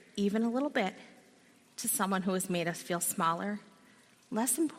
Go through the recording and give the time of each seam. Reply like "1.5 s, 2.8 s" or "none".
none